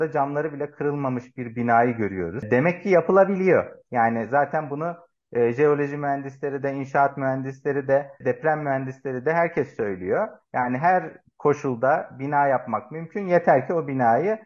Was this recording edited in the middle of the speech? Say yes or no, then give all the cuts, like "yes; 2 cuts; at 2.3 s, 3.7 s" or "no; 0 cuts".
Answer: yes; 1 cut; at 8.2 s